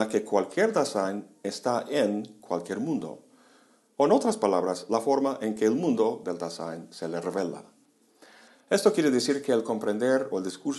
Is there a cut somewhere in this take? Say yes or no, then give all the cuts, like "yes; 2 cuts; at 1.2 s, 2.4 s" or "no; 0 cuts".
yes; 1 cut; at 8.6 s